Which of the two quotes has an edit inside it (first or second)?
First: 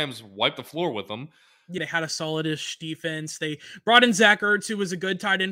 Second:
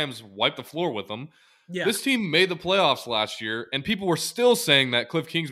first